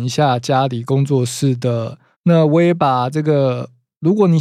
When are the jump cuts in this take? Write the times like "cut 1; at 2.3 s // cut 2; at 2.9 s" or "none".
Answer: cut 1; at 2.1 s